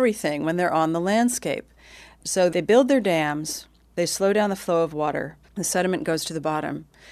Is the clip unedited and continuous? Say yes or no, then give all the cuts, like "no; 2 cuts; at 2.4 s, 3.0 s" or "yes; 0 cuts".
no; 1 cut; at 5.5 s